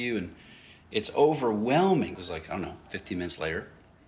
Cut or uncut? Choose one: cut